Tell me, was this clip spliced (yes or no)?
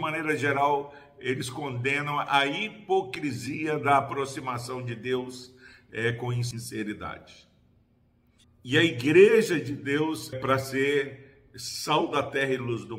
yes